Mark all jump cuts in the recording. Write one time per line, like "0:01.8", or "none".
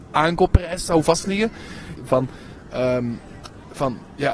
0:02.0